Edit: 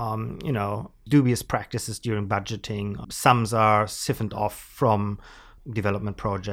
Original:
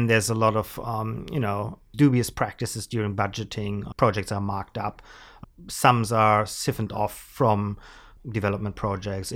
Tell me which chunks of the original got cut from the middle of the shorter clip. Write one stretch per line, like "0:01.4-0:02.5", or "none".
0:03.9-0:05.6